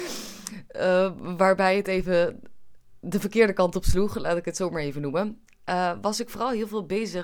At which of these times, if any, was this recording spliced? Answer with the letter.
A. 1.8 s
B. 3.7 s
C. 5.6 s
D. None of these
D